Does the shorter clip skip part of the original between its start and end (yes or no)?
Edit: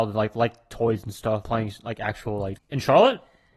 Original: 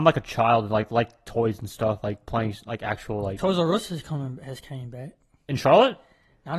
yes